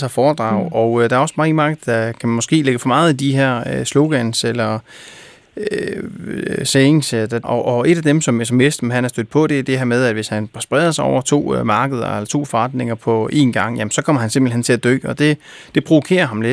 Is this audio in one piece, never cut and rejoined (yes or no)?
no